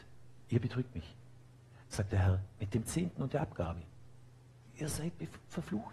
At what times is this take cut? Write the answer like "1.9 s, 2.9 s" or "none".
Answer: 1.8 s